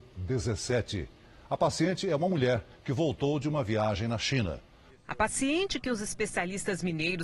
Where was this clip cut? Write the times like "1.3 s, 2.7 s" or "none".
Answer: 4.9 s